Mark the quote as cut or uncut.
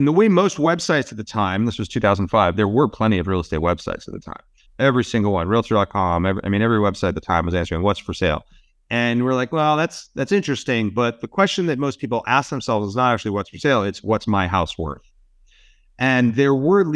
cut